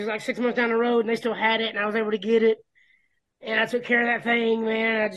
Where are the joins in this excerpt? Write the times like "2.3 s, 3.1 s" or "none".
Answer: none